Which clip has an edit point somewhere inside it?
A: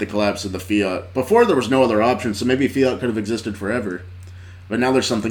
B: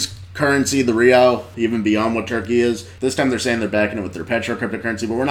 B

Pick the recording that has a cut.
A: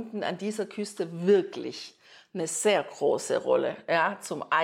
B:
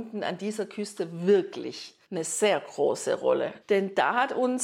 B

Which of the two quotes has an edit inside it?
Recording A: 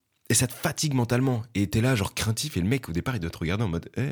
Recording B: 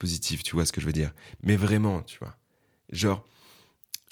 B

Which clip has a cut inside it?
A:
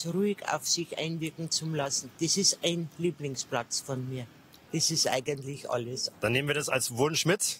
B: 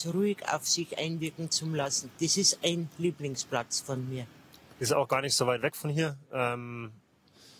A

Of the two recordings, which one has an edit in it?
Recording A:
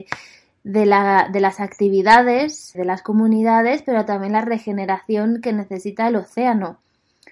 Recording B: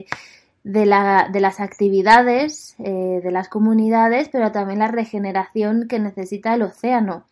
A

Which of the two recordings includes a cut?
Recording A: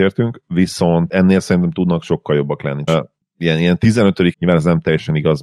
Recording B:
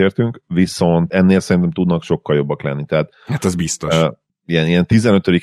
A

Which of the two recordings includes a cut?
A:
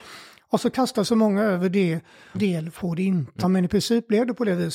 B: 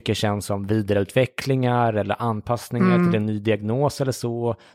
A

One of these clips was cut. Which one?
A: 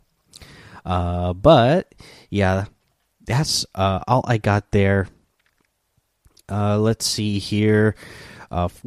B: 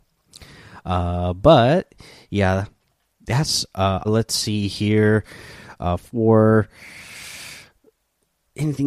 B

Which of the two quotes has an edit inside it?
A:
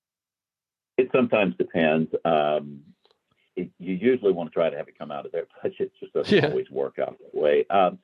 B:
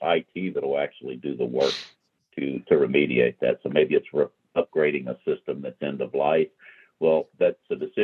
A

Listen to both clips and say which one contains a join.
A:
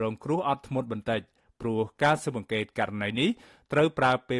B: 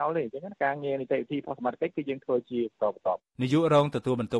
B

